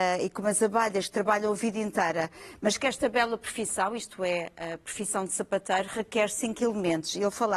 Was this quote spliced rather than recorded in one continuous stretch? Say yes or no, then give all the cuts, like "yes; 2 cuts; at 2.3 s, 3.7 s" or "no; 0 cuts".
no; 0 cuts